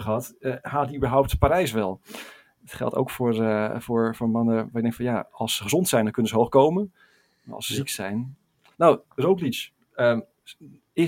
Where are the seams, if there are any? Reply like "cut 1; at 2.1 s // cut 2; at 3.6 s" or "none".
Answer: none